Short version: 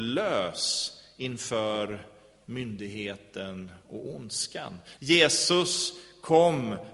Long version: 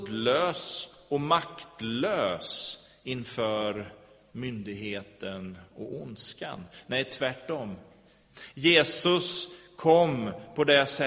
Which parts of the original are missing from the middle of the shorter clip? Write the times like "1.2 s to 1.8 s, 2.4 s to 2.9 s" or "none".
6.8 s to 8.5 s